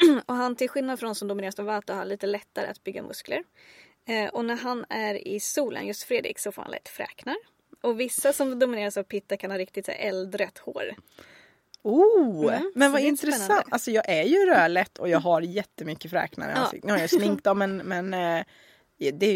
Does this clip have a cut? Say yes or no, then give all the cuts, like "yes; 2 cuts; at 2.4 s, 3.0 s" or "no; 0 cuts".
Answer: no; 0 cuts